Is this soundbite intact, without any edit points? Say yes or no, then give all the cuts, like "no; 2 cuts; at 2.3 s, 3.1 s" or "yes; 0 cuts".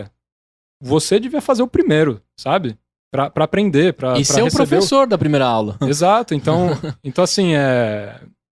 yes; 0 cuts